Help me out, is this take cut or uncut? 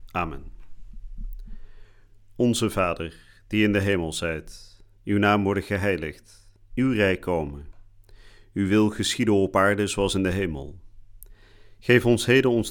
uncut